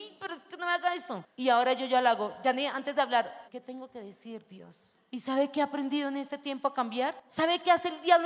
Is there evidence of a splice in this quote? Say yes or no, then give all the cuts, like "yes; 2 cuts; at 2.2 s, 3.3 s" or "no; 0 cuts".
yes; 3 cuts; at 3.4 s, 5.1 s, 7.3 s